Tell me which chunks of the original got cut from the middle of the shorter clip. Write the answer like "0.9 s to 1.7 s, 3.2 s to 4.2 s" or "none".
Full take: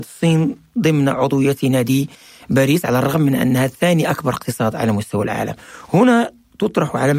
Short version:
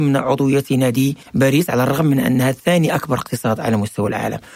2.2 s to 2.4 s